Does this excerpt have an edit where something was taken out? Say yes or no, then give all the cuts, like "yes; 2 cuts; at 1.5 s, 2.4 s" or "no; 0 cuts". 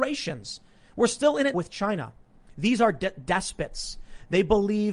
yes; 1 cut; at 1.5 s